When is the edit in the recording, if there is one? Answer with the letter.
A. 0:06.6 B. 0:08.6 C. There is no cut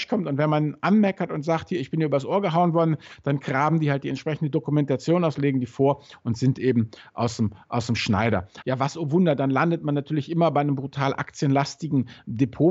B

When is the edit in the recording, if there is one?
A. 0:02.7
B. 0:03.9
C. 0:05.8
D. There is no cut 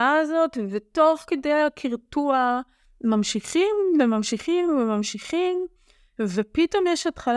D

